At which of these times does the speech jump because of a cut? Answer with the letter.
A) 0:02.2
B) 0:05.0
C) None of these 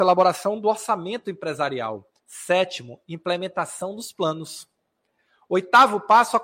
A